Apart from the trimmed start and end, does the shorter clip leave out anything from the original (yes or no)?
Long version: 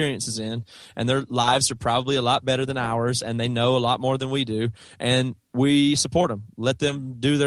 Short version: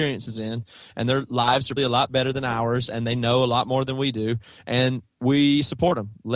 yes